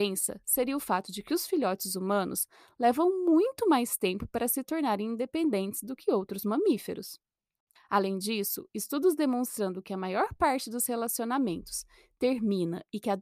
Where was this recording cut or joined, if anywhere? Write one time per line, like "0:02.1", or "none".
0:07.8